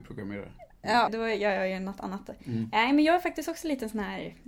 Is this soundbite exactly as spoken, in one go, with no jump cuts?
no; 1 cut; at 1.1 s

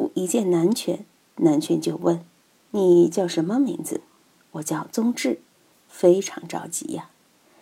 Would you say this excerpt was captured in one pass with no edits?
no; 1 cut; at 5.7 s

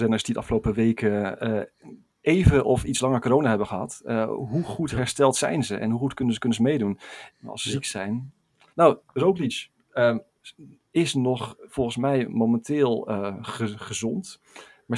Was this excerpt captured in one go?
no; 1 cut; at 7.3 s

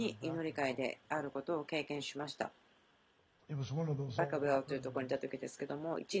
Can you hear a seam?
no; 0 cuts

